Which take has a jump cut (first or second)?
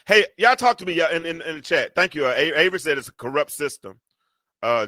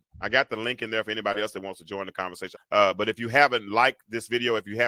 second